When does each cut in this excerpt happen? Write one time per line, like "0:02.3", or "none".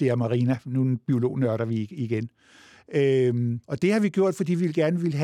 0:03.6